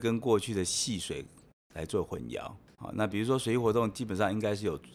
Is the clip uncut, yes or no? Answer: yes